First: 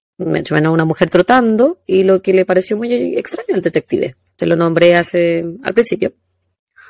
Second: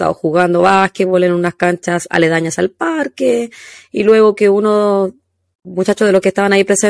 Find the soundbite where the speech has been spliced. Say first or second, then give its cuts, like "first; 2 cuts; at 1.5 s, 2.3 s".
first; 1 cut; at 4.3 s